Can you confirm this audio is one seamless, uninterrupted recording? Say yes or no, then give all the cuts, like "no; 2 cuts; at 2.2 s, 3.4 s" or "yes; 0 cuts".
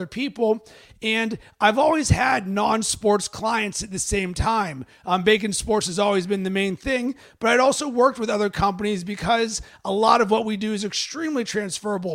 yes; 0 cuts